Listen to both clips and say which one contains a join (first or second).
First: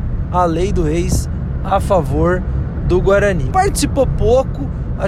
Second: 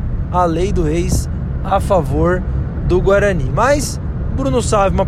first